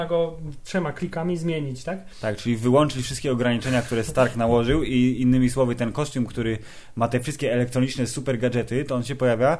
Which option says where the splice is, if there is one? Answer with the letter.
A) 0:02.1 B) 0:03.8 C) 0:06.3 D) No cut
D